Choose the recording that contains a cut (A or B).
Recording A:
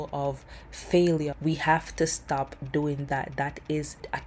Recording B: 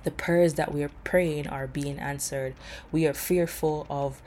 A